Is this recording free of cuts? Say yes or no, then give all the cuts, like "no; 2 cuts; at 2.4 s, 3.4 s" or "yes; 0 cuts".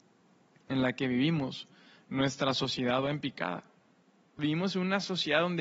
no; 1 cut; at 4.4 s